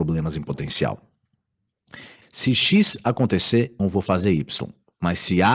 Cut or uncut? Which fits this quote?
cut